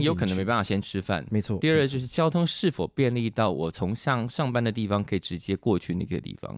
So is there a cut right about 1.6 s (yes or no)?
no